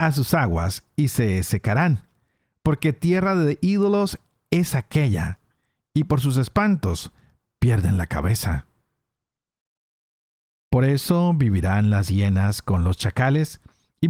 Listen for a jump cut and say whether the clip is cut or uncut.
uncut